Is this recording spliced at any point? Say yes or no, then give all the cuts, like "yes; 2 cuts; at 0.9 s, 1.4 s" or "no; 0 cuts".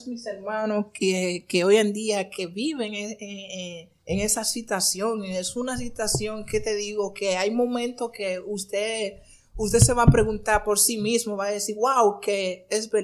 yes; 1 cut; at 4.0 s